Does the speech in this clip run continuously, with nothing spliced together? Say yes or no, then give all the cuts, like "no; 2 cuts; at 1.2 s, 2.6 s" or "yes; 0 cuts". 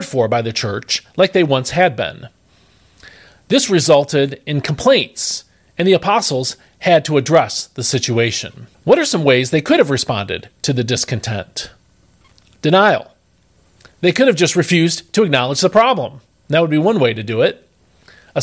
yes; 0 cuts